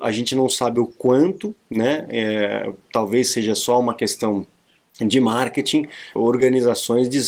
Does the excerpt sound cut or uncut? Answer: cut